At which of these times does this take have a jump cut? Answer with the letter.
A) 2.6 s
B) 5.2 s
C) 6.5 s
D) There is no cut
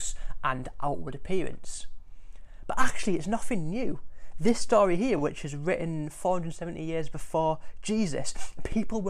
D